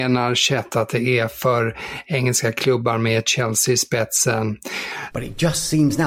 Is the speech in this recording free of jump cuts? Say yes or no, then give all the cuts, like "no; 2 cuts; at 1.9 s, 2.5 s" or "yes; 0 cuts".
no; 1 cut; at 5.1 s